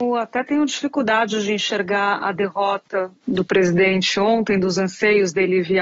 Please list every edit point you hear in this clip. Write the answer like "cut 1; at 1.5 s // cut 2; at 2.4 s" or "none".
cut 1; at 3.2 s